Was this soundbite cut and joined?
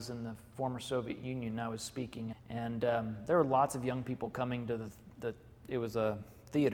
yes; 1 cut; at 2.3 s

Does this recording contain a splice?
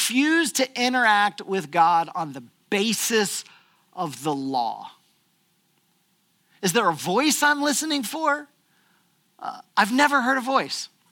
yes; 1 cut; at 6.6 s

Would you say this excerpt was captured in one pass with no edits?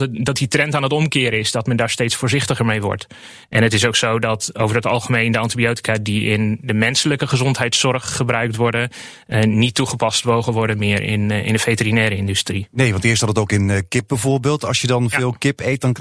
yes; 0 cuts

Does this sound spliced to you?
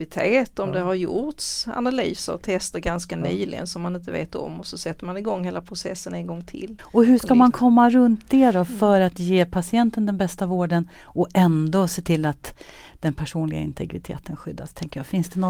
yes; 1 cut; at 6.8 s

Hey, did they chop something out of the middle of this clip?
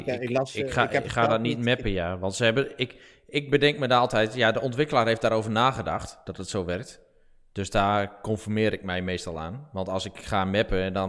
no; 0 cuts

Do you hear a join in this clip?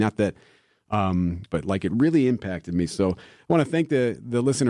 yes; 1 cut; at 1.5 s

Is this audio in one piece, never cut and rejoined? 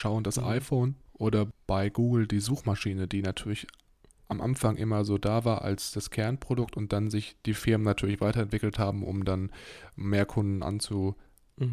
yes; 0 cuts

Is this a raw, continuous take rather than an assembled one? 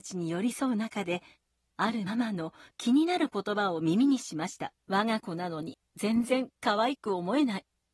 no; 2 cuts; at 2.1 s, 4.8 s

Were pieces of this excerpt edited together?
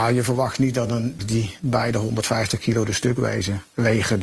yes; 1 cut; at 1.2 s

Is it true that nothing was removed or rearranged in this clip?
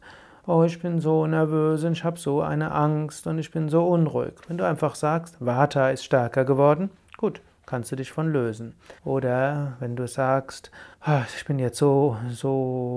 no; 2 cuts; at 9.0 s, 10.9 s

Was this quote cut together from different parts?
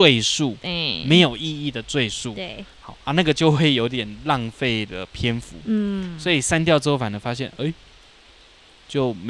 no; 0 cuts

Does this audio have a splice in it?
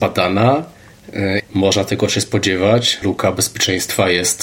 yes; 2 cuts; at 1.4 s, 3.0 s

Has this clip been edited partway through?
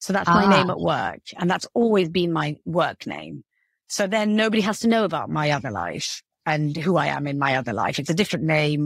no; 0 cuts

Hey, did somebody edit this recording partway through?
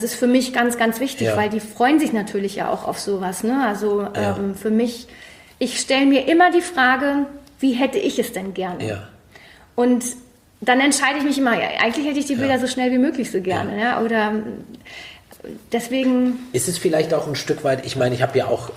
no; 0 cuts

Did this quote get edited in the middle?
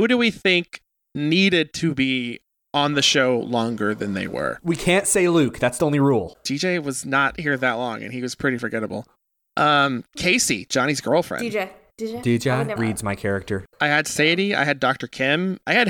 yes; 2 cuts; at 6.3 s, 12.8 s

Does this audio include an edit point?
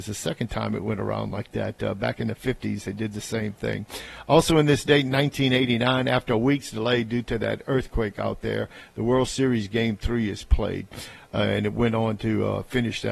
no; 0 cuts

